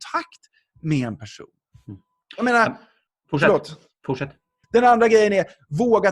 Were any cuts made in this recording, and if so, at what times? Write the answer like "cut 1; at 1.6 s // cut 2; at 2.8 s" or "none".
cut 1; at 4.6 s